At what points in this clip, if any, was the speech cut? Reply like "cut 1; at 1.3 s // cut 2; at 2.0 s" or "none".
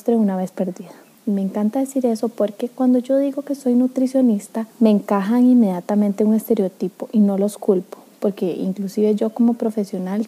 cut 1; at 1.1 s // cut 2; at 4.7 s